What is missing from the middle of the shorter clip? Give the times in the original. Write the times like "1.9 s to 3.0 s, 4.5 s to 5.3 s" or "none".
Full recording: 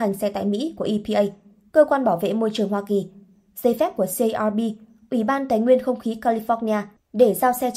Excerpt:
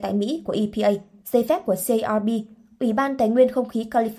1.5 s to 3.5 s